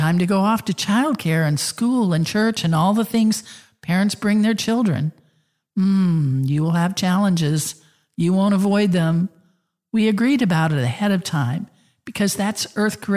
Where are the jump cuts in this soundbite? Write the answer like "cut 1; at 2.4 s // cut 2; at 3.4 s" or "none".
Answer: none